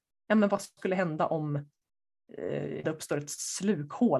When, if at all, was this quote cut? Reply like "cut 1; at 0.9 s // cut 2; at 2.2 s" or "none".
cut 1; at 2.8 s